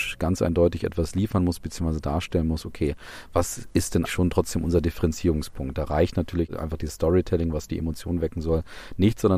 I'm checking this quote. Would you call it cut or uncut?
cut